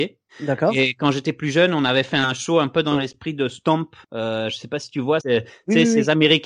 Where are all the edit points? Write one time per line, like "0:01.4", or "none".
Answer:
0:04.0
0:05.2